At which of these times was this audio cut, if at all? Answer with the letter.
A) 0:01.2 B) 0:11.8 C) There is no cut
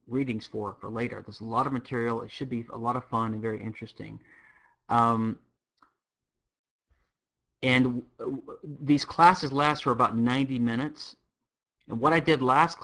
C